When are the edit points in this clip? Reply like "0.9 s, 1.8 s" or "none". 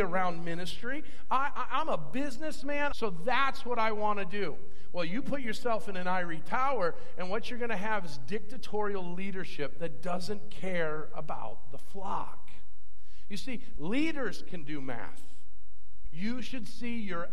2.9 s, 13.7 s, 16.0 s